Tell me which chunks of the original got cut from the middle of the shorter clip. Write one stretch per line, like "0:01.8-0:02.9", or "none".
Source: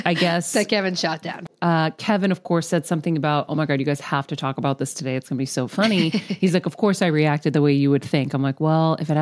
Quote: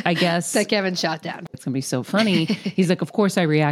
0:01.5-0:05.2